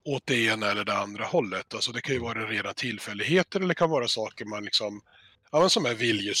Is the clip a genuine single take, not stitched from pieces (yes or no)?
yes